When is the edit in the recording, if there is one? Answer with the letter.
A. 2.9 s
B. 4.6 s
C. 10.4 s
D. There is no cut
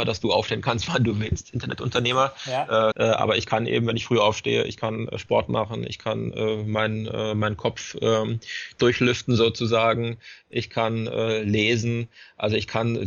A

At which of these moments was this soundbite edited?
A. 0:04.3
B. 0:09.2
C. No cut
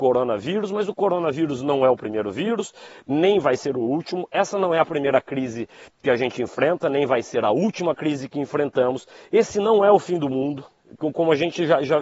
C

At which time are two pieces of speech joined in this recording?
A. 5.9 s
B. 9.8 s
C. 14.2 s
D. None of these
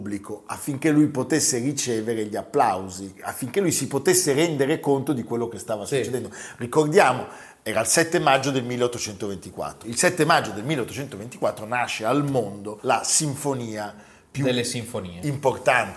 B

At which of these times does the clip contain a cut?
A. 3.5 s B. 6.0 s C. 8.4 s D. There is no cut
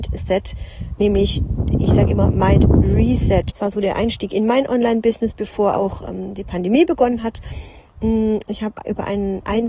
A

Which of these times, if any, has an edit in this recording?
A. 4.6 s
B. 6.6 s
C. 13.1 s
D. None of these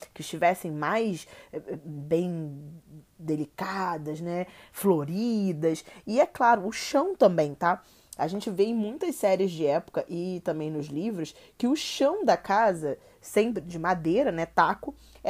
D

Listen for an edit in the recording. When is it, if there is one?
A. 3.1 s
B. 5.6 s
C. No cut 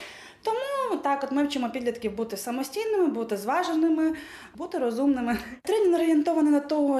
B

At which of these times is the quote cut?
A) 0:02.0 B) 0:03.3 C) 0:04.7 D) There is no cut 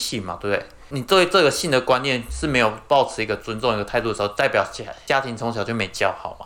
D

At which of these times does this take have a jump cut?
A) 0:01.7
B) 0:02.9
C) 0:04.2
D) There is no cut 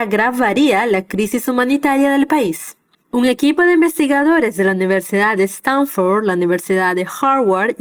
B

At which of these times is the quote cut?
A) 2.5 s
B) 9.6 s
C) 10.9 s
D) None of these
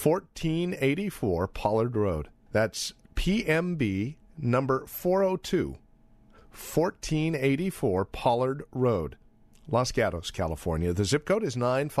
A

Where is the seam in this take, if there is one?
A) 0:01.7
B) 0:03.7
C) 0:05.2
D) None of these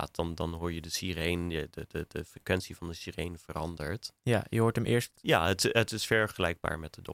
C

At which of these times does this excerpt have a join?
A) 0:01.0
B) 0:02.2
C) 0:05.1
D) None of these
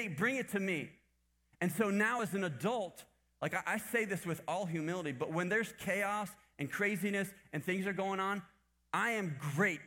D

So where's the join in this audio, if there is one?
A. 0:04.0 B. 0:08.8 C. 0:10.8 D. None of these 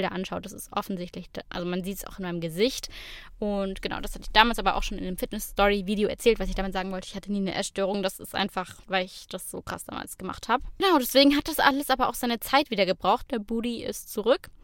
B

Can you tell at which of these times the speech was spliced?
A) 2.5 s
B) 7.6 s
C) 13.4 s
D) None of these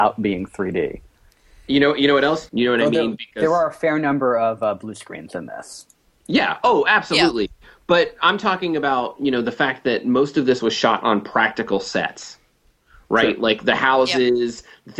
A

